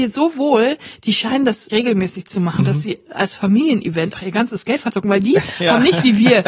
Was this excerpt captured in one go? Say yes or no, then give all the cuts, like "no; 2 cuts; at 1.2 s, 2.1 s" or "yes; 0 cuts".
no; 2 cuts; at 1.7 s, 4.1 s